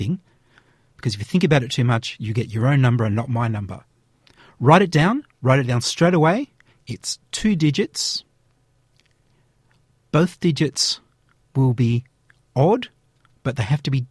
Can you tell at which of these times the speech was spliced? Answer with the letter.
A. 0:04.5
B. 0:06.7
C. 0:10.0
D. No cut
B